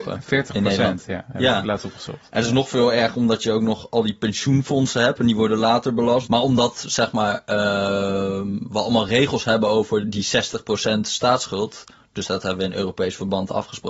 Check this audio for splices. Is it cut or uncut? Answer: cut